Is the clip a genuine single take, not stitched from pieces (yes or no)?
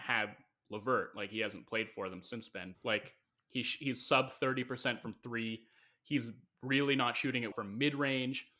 no